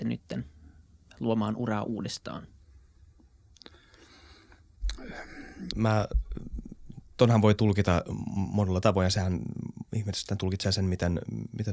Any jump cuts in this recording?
yes; 1 cut; at 5.7 s

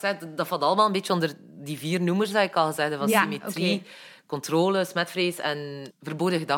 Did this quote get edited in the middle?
no; 0 cuts

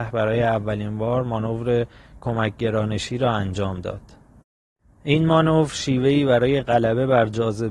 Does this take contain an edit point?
no; 0 cuts

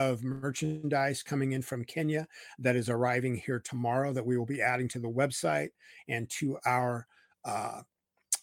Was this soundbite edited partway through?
no; 0 cuts

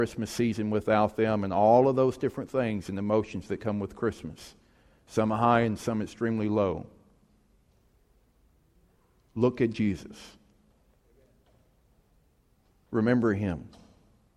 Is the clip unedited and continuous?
yes; 0 cuts

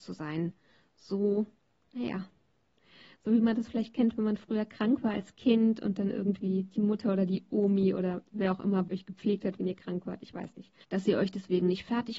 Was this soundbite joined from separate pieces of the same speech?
yes; 2 cuts; at 8.9 s, 10.8 s

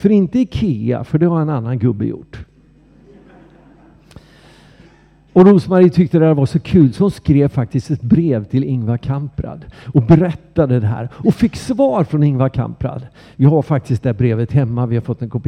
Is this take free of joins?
yes; 0 cuts

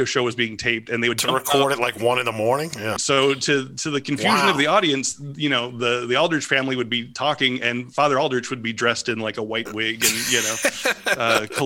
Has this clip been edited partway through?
yes; 1 cut; at 3.0 s

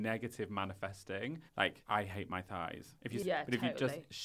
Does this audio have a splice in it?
yes; 1 cut; at 3.2 s

